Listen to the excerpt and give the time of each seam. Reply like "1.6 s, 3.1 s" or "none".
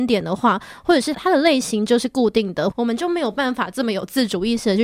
1.1 s, 2.7 s

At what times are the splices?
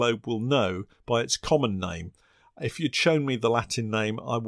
none

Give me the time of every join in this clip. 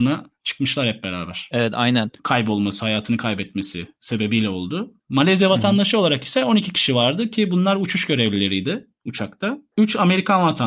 2.2 s

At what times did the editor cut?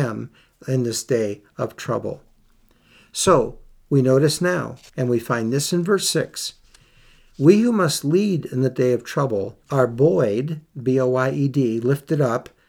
4.9 s, 9.6 s

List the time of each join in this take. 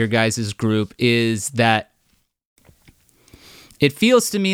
none

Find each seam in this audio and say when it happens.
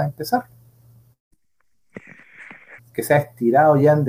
2.8 s

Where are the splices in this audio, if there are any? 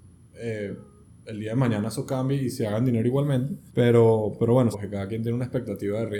3.7 s, 4.7 s

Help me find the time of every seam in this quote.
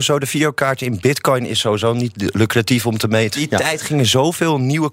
3.3 s

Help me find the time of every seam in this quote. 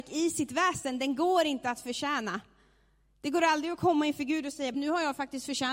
4.7 s

